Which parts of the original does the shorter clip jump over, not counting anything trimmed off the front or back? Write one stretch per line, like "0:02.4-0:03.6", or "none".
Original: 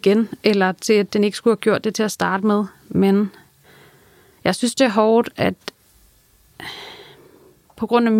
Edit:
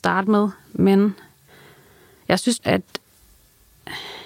0:04.7-0:05.3

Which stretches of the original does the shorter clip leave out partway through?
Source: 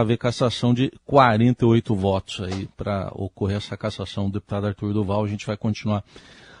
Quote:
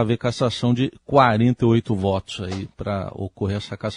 none

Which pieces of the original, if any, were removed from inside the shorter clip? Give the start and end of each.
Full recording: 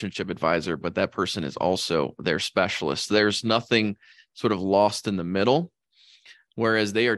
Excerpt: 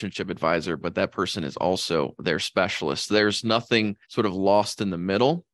0:04.0-0:04.3

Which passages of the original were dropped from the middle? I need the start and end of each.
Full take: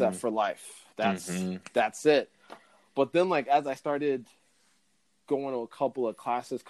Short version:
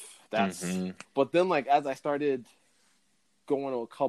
0:01.7-0:02.8

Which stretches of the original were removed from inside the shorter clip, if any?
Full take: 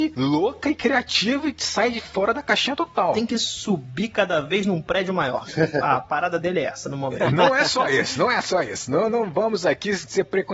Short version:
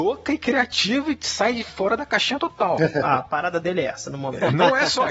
0:03.1-0:05.6

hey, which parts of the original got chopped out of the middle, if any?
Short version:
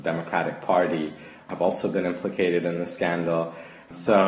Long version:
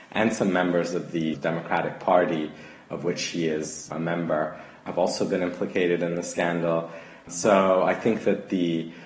0:02.7-0:04.7

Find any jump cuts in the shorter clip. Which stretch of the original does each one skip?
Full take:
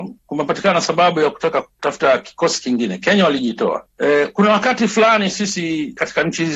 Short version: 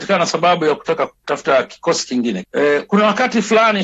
0:03.0-0:03.9

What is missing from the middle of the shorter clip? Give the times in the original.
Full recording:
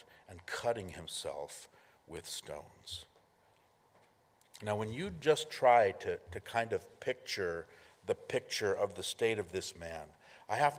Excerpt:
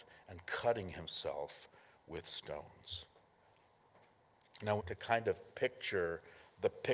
0:04.8-0:06.2

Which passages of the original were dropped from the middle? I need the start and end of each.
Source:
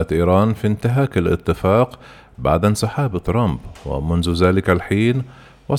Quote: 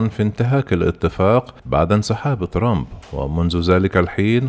0:02.0-0:02.3

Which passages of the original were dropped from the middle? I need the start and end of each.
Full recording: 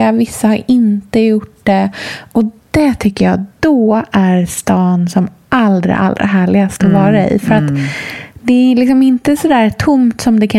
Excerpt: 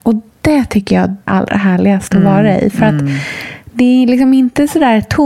0:03.6-0:06.0

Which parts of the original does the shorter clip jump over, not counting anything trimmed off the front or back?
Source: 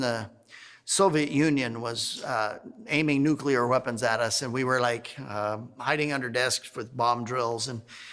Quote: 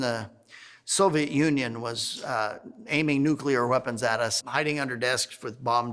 0:04.4-0:05.7

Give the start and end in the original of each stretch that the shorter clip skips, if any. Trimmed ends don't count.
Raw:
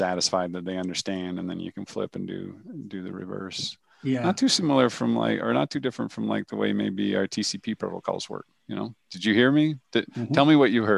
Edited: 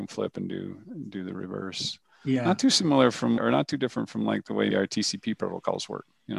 0:05.2-0:05.4
0:06.7-0:07.1

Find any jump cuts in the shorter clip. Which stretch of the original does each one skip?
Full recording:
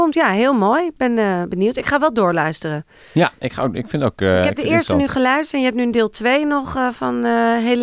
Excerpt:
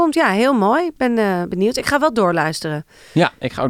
none

